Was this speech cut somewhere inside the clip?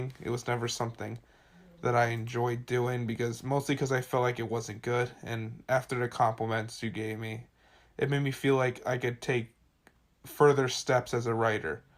no; 0 cuts

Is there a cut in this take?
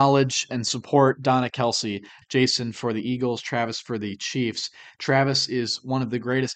yes; 1 cut; at 2.2 s

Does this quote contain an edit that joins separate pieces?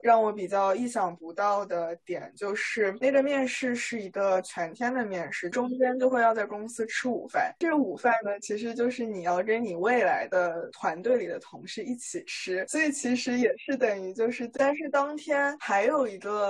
yes; 2 cuts; at 5.5 s, 14.6 s

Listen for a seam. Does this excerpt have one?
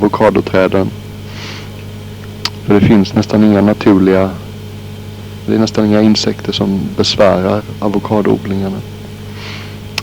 yes; 2 cuts; at 2.6 s, 5.5 s

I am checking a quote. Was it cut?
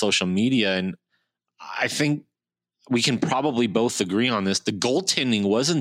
no; 0 cuts

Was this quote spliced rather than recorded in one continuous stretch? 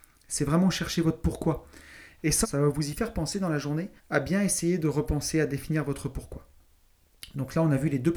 yes; 2 cuts; at 2.4 s, 4.0 s

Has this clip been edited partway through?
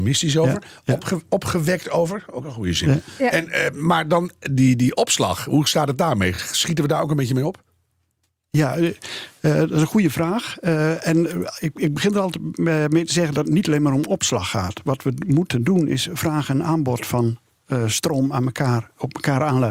no; 0 cuts

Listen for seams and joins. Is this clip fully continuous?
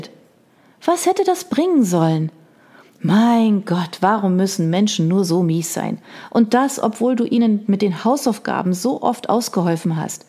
yes; 0 cuts

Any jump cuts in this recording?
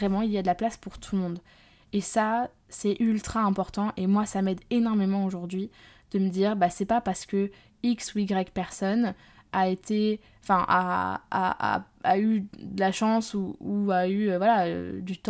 no; 0 cuts

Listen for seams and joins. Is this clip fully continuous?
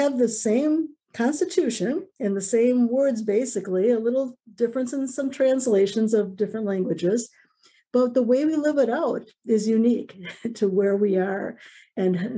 yes; 0 cuts

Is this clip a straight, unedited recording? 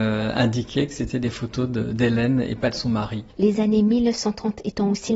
no; 1 cut; at 3.3 s

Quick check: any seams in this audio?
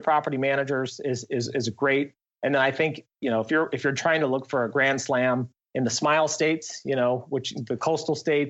no; 0 cuts

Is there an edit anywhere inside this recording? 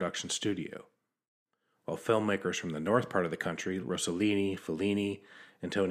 yes; 1 cut; at 3.8 s

